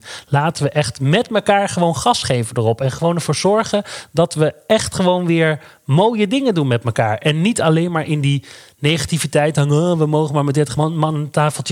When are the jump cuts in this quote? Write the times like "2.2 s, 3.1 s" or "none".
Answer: none